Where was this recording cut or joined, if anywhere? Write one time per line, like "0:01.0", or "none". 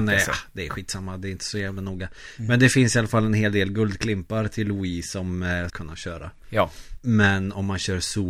0:05.7
0:07.0